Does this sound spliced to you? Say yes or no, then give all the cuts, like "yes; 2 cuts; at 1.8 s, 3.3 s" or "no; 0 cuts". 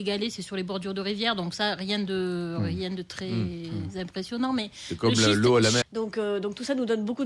yes; 1 cut; at 5.8 s